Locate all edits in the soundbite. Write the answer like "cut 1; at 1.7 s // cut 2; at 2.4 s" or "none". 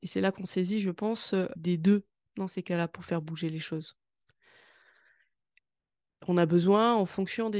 cut 1; at 1.6 s